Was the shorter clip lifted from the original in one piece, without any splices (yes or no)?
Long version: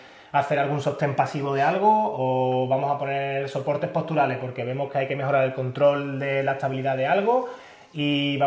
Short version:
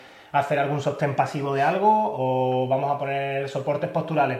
yes